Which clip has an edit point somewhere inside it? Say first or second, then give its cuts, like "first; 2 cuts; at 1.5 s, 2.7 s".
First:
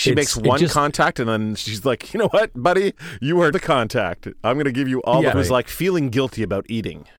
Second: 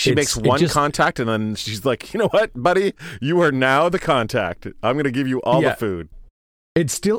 first; 2 cuts; at 3.5 s, 5.3 s